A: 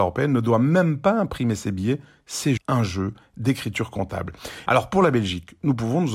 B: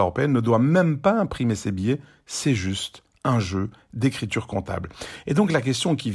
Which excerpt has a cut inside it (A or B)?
A